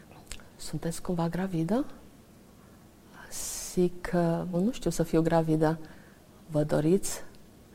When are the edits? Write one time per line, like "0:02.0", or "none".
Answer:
0:04.5